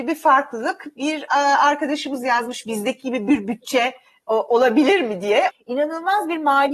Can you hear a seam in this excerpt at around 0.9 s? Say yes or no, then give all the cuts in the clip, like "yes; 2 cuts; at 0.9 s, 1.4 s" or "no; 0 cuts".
no; 1 cut; at 5.5 s